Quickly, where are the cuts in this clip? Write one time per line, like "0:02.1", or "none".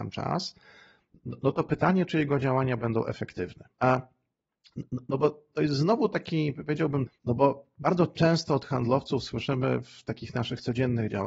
0:03.7
0:07.1